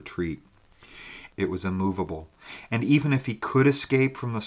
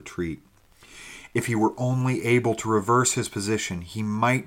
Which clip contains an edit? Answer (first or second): first